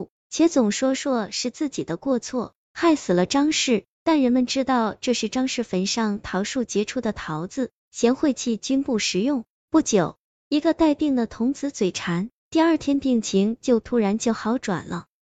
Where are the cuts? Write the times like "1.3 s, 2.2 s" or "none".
3.9 s, 12.4 s